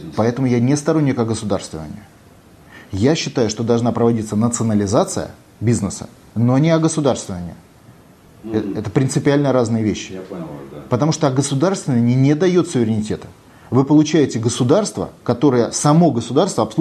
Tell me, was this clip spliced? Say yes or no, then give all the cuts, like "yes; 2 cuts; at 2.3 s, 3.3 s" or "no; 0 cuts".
no; 0 cuts